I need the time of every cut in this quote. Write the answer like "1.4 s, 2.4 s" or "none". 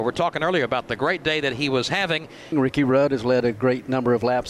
2.5 s